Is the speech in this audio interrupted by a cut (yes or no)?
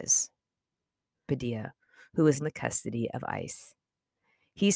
yes